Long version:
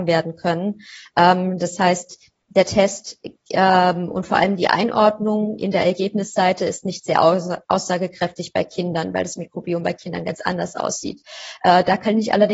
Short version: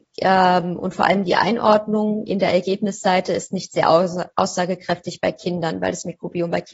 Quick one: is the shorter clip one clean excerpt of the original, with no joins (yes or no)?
yes